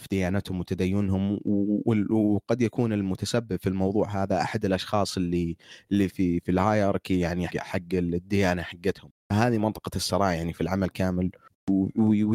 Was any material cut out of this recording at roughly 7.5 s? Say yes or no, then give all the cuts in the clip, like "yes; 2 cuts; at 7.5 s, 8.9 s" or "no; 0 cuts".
yes; 2 cuts; at 6.1 s, 7.5 s